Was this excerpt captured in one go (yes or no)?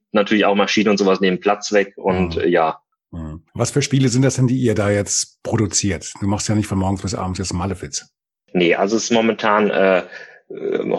yes